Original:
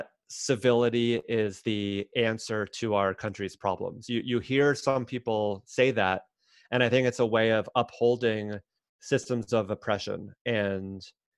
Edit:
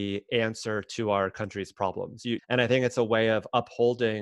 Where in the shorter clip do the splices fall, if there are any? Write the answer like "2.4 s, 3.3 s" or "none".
2.4 s